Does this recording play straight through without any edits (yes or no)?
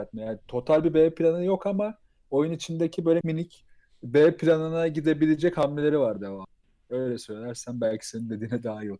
no